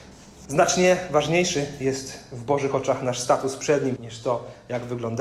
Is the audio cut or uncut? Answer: cut